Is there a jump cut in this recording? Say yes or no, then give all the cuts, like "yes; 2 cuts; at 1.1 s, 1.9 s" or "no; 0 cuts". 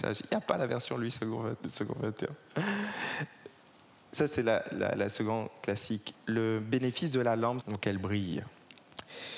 yes; 2 cuts; at 6.1 s, 7.6 s